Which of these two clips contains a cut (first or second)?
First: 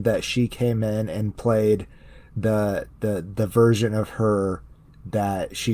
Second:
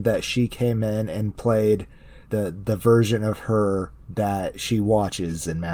second